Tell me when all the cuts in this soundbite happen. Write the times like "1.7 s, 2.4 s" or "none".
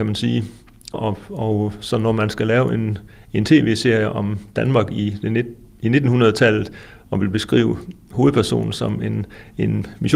0.9 s